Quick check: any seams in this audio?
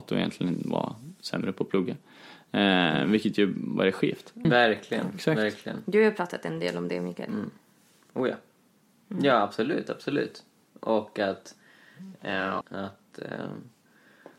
yes; 2 cuts; at 4.4 s, 12.6 s

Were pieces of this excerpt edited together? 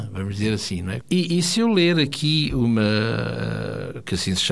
yes; 1 cut; at 1.0 s

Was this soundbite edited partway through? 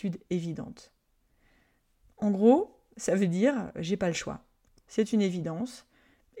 yes; 1 cut; at 4.8 s

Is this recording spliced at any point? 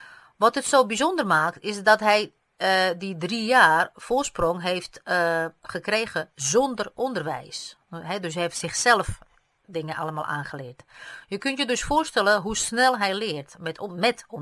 no; 0 cuts

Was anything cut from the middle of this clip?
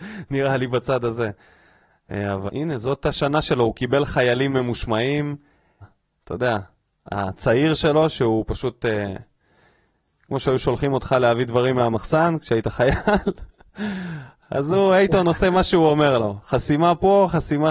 yes; 2 cuts; at 2.5 s, 5.8 s

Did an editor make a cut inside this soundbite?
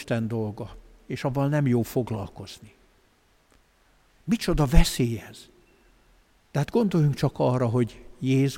yes; 1 cut; at 4.1 s

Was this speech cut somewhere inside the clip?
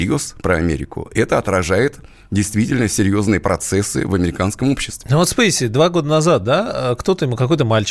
no; 0 cuts

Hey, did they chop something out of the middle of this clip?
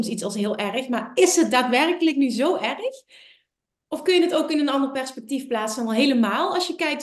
no; 0 cuts

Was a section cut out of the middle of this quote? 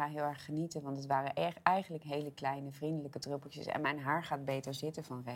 no; 0 cuts

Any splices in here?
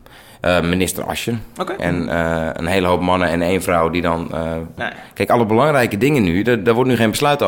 yes; 2 cuts; at 1.8 s, 4.8 s

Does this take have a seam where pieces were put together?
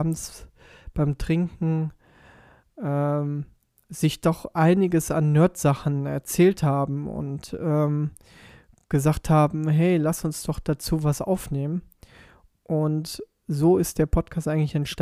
no; 0 cuts

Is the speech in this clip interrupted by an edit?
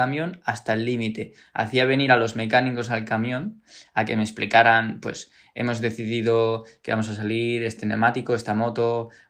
no; 0 cuts

